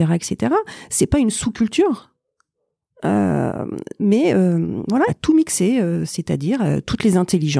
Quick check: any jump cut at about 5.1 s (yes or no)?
yes